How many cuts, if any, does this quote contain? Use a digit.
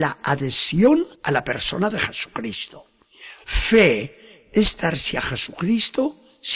1